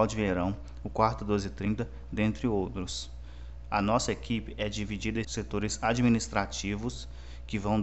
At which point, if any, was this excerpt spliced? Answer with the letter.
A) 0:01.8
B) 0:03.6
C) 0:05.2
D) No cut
C